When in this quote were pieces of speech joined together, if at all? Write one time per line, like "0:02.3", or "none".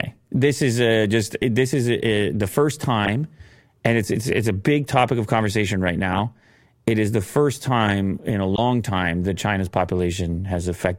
none